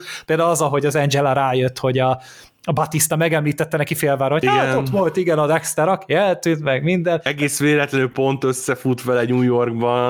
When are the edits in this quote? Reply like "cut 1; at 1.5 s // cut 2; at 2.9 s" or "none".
none